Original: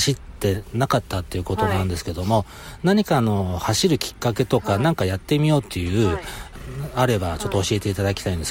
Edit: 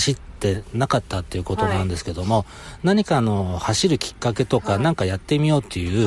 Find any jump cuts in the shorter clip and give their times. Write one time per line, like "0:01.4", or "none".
none